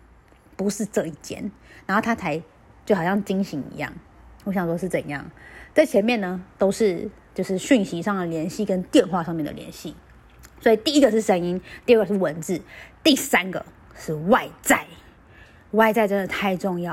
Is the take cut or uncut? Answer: uncut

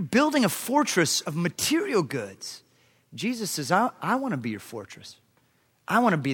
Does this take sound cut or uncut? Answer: uncut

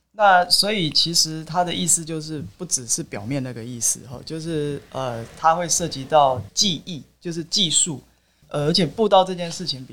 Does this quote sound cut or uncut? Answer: cut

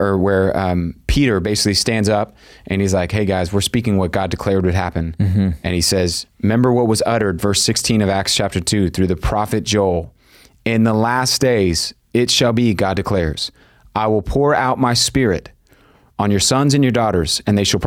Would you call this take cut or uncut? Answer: uncut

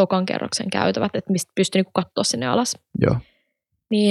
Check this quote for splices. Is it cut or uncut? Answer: uncut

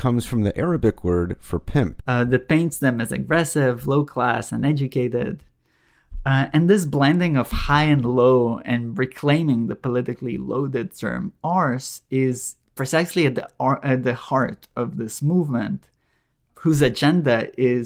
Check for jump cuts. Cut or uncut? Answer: cut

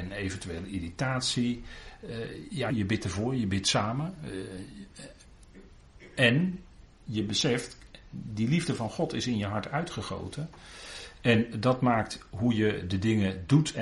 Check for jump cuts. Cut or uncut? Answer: cut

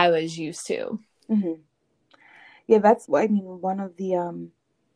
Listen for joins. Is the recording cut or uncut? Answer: cut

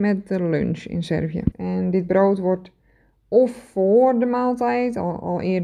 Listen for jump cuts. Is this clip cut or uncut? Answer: cut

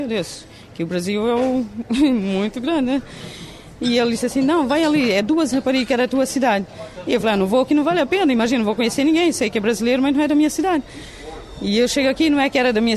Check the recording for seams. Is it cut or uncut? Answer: uncut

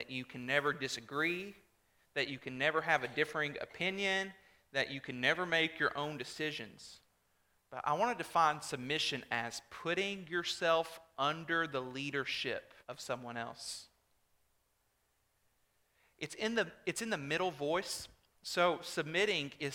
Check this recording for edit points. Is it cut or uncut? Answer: cut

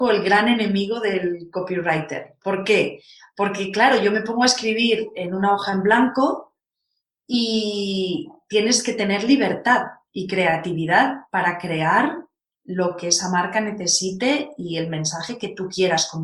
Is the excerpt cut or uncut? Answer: uncut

